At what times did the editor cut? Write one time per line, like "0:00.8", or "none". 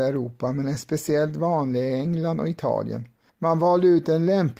0:03.3